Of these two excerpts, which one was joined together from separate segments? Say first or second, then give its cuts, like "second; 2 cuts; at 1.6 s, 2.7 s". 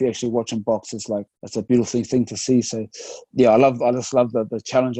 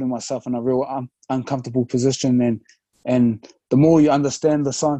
first; 2 cuts; at 1.3 s, 3.3 s